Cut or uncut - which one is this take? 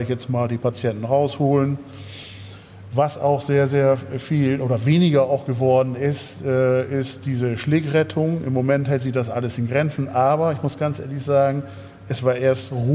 uncut